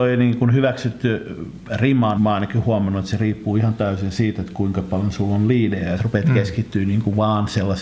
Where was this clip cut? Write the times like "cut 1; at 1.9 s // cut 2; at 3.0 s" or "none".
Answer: cut 1; at 2.2 s // cut 2; at 6.0 s